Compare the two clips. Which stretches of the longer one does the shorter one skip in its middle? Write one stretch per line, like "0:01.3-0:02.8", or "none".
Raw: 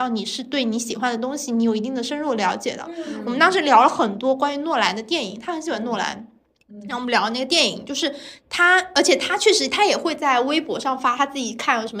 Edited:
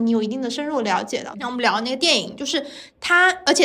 0:02.9-0:06.8